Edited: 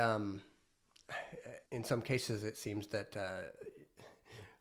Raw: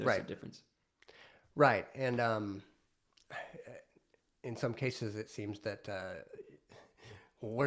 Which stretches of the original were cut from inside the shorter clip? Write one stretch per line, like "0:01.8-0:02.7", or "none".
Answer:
0:03.9-0:04.4